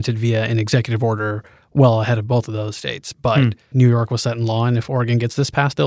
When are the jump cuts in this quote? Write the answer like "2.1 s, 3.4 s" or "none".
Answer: 3.7 s